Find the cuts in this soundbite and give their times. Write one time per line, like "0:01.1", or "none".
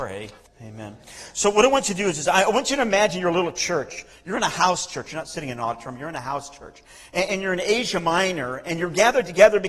none